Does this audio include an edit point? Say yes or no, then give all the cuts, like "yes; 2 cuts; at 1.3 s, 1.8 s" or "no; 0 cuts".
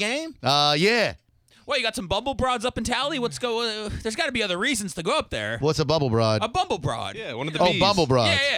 no; 0 cuts